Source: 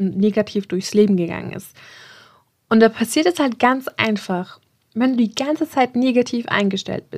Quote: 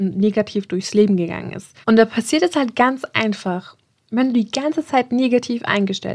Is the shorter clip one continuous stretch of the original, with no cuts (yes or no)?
no